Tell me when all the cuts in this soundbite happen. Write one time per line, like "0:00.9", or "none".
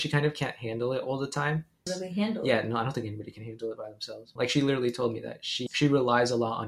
0:01.9
0:04.4
0:05.7